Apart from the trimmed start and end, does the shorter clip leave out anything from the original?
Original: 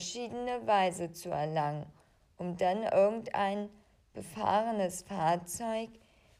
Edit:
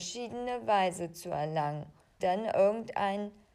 yes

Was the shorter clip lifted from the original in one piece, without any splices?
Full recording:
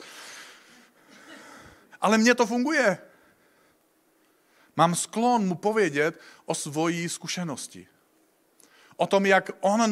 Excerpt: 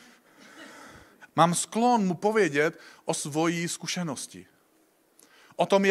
no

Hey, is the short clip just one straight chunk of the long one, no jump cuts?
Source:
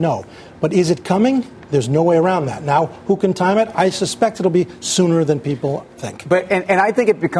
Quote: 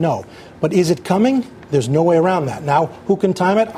yes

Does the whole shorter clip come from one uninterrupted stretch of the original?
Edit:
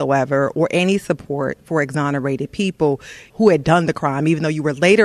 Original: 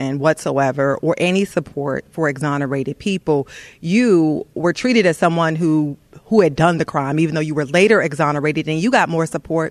no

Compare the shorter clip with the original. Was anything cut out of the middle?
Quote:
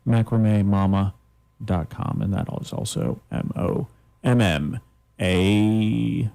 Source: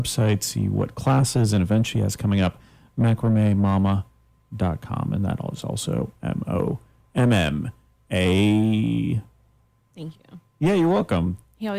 no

